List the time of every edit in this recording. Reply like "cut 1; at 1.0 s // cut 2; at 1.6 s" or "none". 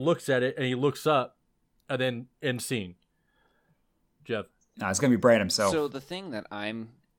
none

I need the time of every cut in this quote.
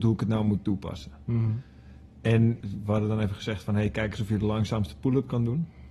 cut 1; at 2.6 s

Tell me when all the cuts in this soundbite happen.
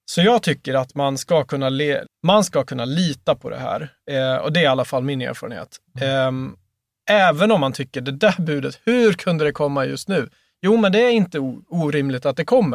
cut 1; at 2.0 s

